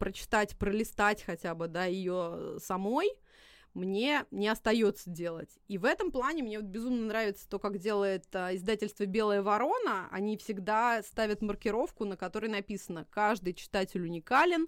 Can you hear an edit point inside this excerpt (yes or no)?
no